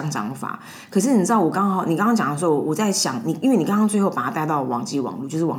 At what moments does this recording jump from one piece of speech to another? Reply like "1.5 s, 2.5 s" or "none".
none